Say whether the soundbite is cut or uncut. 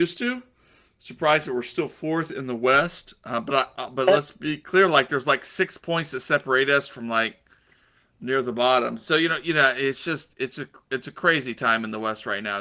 uncut